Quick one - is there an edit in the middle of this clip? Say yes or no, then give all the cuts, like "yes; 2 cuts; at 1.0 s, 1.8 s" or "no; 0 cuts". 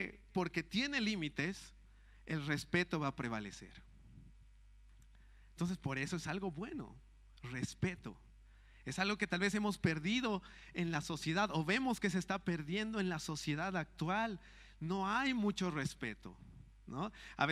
no; 0 cuts